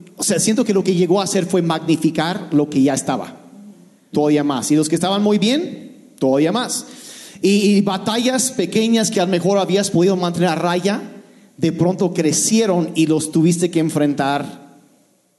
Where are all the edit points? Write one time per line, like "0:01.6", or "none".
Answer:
0:04.1